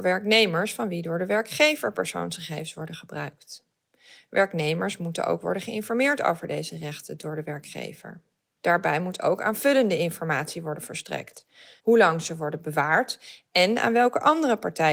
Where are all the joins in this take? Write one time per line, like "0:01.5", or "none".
0:08.6
0:11.8